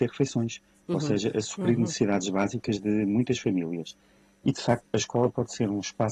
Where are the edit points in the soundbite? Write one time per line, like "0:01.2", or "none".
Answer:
0:04.8